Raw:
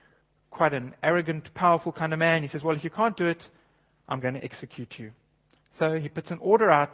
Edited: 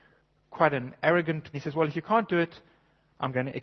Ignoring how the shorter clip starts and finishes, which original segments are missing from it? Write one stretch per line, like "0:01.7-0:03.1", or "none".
0:01.5-0:02.4